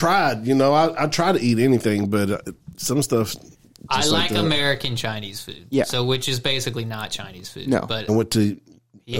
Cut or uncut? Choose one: cut